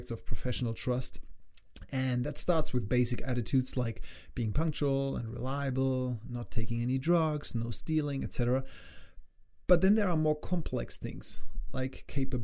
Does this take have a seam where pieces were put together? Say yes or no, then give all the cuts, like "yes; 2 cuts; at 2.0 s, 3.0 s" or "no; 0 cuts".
no; 0 cuts